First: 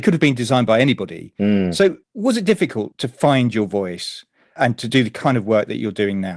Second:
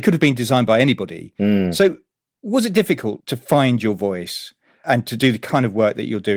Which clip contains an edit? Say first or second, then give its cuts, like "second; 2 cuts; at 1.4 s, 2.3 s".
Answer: first; 1 cut; at 2.0 s